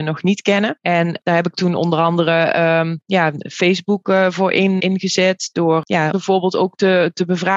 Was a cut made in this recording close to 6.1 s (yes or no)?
yes